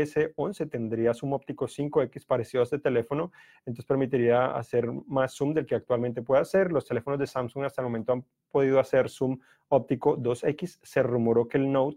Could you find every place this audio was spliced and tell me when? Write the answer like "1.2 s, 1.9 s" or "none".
none